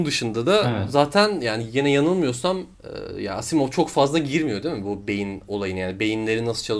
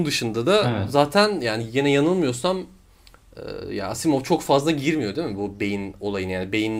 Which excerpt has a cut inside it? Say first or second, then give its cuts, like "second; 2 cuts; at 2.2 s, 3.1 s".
first; 1 cut; at 2.7 s